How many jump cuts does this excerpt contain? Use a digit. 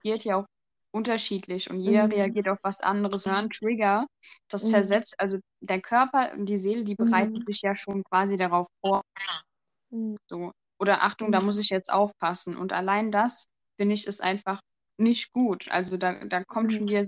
2